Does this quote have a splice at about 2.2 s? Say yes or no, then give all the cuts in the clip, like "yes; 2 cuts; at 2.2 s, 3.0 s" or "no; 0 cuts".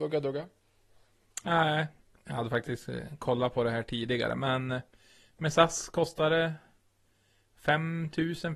yes; 1 cut; at 2.2 s